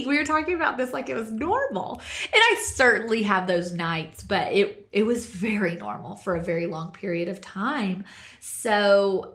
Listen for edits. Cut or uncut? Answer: uncut